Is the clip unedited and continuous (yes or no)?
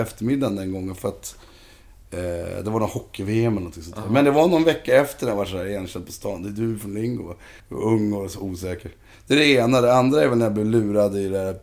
no